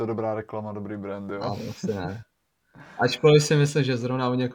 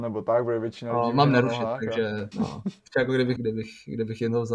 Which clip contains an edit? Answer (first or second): second